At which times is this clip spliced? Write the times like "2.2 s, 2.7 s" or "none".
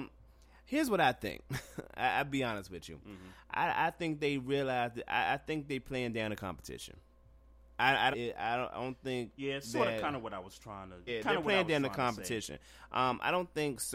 8.1 s, 11.1 s